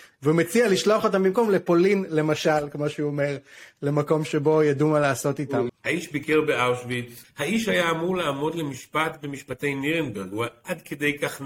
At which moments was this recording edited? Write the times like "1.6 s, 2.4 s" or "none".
5.7 s, 7.2 s